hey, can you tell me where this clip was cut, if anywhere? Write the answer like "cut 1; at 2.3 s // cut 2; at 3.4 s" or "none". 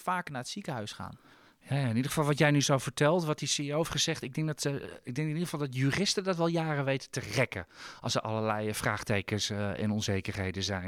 none